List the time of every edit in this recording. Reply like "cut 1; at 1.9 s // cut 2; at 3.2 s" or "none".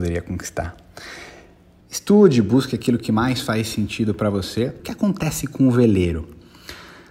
cut 1; at 1.8 s // cut 2; at 4.8 s